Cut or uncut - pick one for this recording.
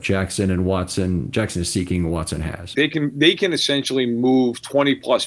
cut